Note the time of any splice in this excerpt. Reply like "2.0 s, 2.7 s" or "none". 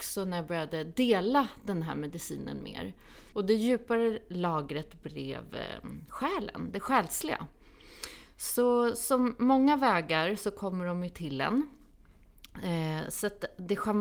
3.3 s